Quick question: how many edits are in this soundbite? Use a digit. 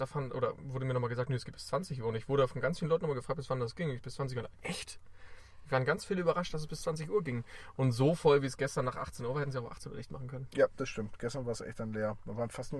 0